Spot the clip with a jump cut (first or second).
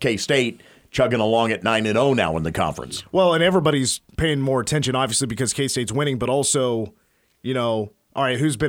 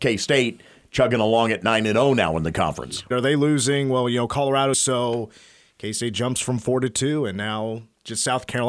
second